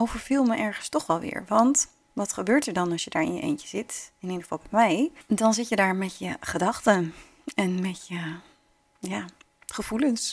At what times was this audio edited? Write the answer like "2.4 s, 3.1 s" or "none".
none